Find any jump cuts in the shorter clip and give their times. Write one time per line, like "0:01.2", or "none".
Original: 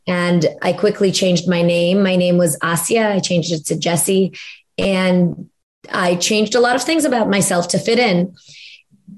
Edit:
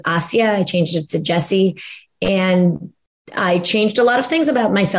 none